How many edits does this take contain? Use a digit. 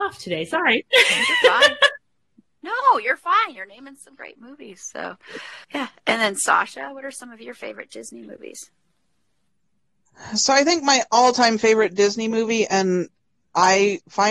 1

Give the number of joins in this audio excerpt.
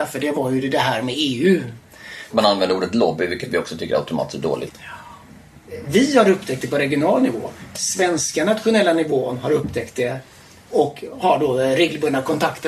2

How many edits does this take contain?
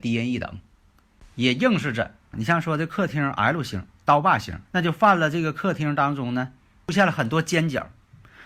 2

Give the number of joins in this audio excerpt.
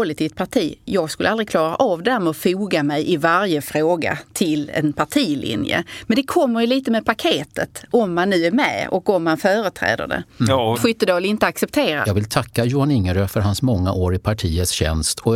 2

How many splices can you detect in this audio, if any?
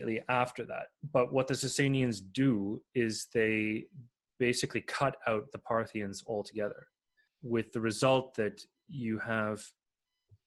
0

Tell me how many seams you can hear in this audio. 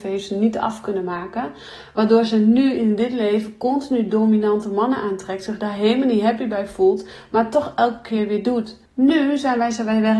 1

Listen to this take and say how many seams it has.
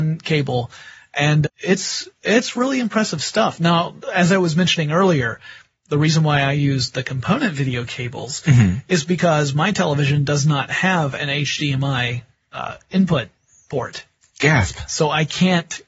1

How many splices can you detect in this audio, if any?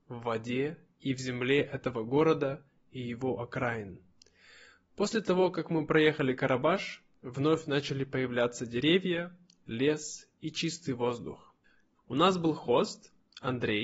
1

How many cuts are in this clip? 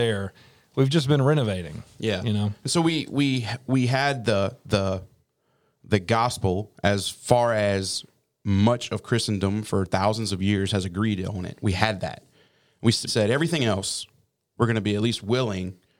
1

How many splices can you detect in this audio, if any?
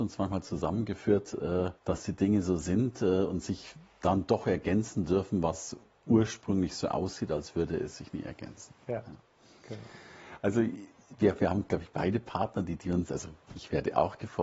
2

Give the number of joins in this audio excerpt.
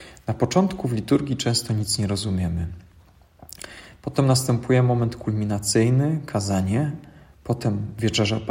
0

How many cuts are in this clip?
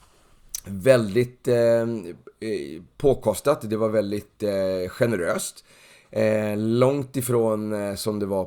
0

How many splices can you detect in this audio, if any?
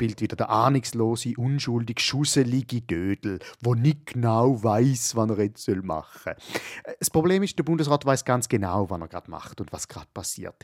0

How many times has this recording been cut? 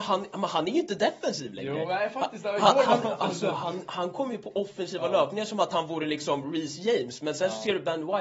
0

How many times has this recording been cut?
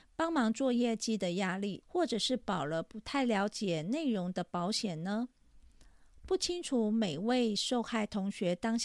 1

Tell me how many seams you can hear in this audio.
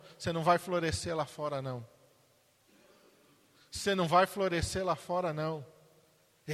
0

